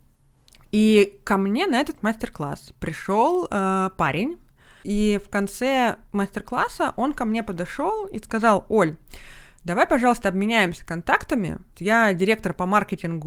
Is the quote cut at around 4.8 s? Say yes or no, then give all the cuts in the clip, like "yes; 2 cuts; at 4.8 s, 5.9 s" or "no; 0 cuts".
yes; 2 cuts; at 4.8 s, 11.7 s